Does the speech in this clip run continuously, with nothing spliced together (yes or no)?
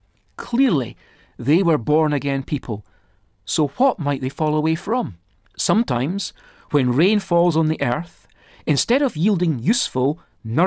no